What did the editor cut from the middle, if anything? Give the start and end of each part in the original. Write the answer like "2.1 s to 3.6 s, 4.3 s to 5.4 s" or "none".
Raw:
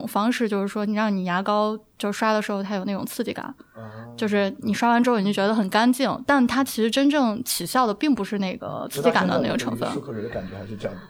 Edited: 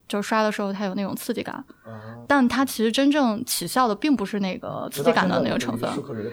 4.2 s to 6.2 s